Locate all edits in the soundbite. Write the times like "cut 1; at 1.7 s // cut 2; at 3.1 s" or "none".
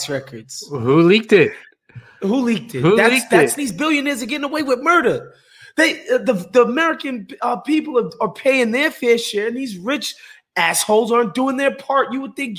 cut 1; at 3.6 s